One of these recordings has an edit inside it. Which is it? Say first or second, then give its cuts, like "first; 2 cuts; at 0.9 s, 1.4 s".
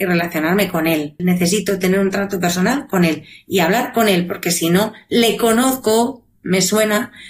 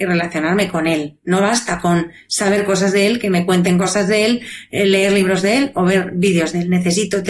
first; 1 cut; at 1.2 s